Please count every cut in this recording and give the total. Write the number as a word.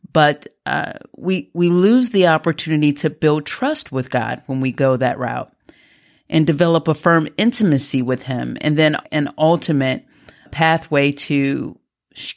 one